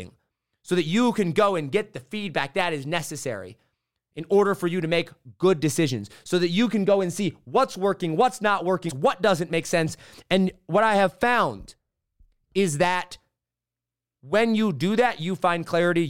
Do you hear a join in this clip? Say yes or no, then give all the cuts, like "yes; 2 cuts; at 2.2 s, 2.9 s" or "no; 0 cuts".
yes; 1 cut; at 8.9 s